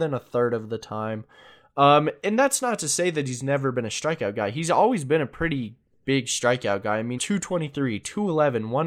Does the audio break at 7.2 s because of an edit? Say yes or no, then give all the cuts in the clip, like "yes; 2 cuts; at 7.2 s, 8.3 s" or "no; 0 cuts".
yes; 1 cut; at 7.2 s